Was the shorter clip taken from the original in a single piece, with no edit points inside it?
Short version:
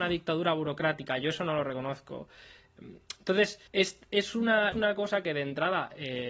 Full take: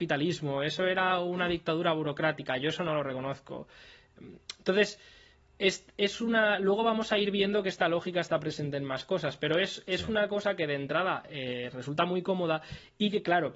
no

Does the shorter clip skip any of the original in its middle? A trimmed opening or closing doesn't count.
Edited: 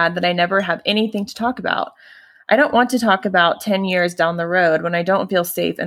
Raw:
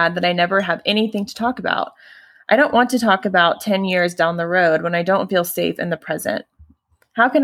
no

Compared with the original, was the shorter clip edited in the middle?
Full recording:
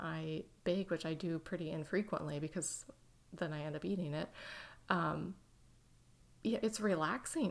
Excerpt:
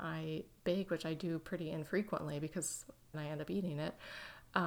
yes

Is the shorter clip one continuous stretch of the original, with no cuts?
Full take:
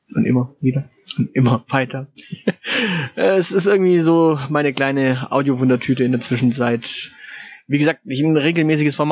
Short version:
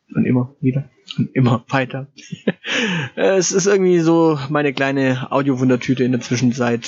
yes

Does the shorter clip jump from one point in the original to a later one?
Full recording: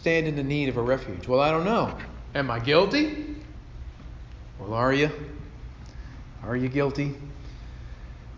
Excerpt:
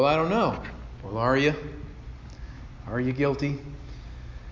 yes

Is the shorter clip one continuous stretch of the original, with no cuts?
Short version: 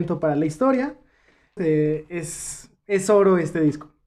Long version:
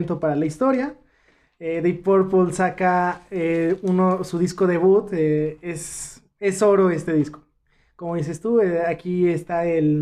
no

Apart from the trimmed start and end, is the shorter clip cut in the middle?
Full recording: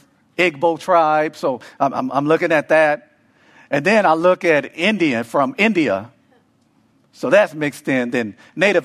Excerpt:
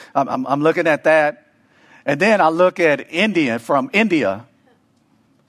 no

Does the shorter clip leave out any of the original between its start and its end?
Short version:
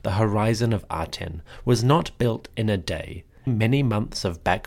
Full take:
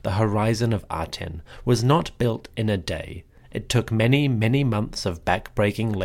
yes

